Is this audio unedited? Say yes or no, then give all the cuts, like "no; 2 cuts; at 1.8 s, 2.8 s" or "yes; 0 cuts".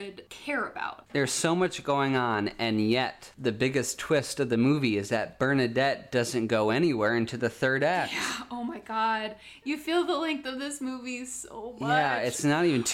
no; 1 cut; at 1.0 s